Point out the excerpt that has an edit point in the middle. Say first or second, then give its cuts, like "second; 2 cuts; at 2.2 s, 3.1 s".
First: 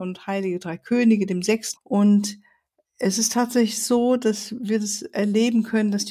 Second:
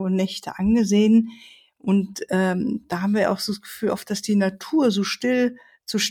first; 1 cut; at 1.8 s